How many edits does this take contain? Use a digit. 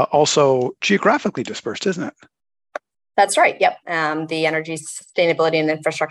1